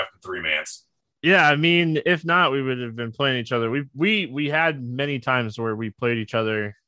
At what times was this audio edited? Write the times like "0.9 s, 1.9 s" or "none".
none